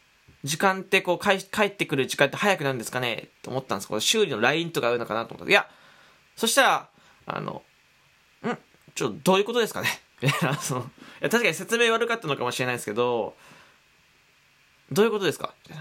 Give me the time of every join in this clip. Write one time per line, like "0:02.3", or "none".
none